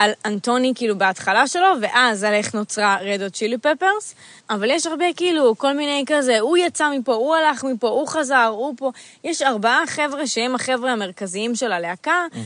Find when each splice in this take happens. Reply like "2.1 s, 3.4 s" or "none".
4.4 s